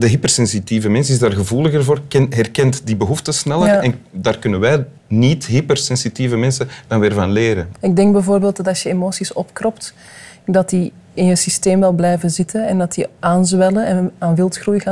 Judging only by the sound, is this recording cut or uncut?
cut